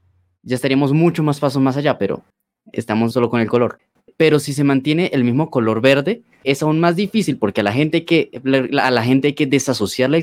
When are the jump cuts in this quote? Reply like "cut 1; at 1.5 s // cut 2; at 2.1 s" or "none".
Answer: cut 1; at 3.1 s

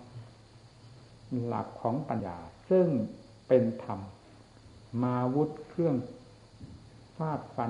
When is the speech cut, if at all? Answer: cut 1; at 2.2 s

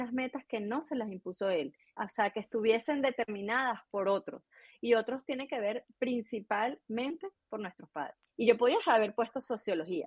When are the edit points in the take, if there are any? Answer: cut 1; at 2.0 s // cut 2; at 8.3 s

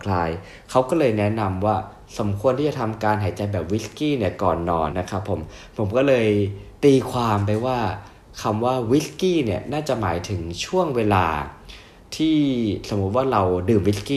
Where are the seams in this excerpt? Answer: cut 1; at 4.9 s

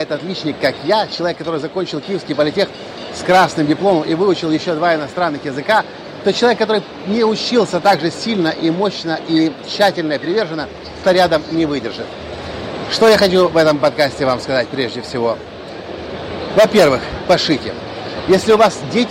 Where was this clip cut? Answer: cut 1; at 11.0 s // cut 2; at 17.3 s

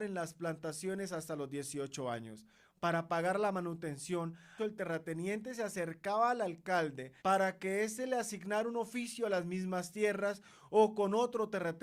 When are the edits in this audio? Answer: cut 1; at 4.6 s // cut 2; at 7.2 s

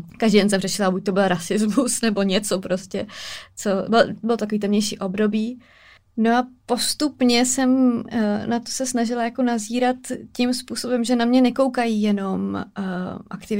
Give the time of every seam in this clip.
none

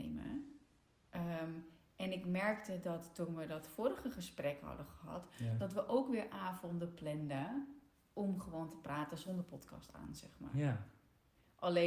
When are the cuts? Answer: none

